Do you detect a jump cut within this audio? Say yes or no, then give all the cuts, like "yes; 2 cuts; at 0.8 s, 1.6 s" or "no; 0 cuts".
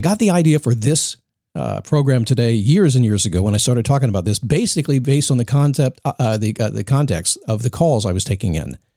no; 0 cuts